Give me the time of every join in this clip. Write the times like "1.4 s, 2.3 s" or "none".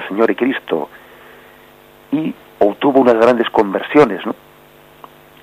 none